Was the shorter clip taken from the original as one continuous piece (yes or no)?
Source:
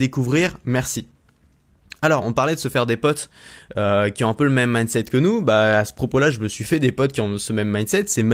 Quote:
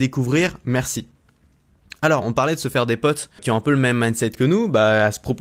no